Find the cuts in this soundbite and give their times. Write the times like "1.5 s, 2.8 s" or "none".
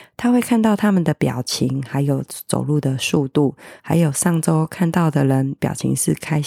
3.8 s